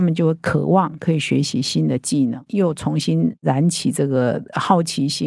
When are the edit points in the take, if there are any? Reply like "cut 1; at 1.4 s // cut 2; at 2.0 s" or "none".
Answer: cut 1; at 2.5 s